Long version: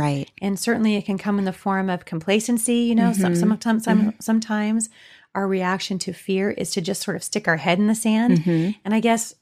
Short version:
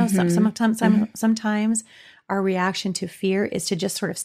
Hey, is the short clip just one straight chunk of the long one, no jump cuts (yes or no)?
yes